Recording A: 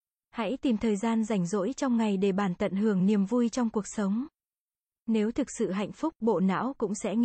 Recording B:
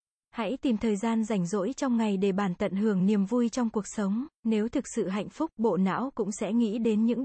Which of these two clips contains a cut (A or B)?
B